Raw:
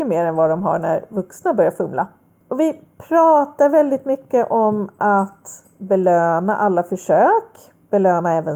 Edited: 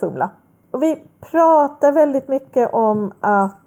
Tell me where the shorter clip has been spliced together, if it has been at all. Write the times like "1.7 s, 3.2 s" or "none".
none